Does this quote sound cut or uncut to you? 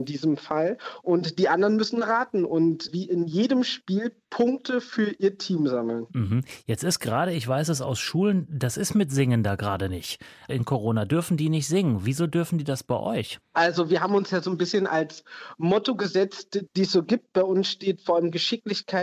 cut